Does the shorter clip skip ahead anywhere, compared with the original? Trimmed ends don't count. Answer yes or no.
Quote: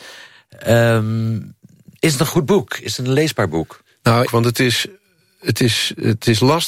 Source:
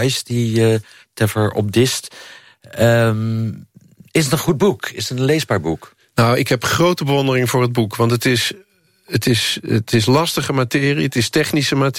yes